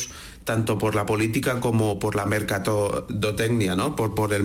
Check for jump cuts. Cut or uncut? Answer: uncut